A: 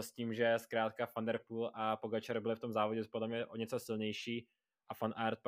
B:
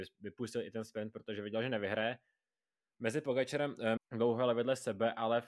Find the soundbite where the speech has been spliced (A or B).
B